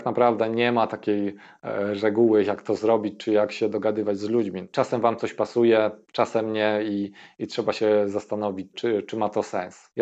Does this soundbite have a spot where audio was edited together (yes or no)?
yes